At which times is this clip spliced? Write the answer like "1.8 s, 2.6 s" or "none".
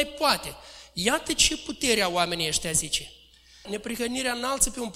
3.6 s